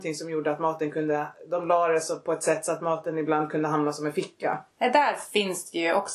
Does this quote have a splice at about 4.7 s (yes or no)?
yes